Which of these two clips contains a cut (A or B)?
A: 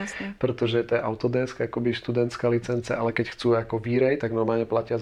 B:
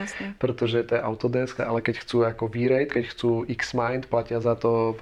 B